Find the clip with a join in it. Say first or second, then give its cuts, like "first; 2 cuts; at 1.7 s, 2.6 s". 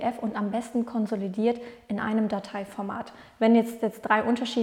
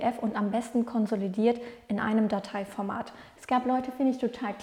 second; 1 cut; at 3.4 s